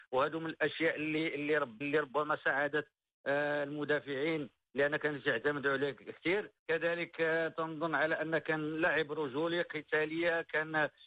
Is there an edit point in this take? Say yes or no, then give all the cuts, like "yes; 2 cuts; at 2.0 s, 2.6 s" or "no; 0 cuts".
yes; 2 cuts; at 1.8 s, 6.6 s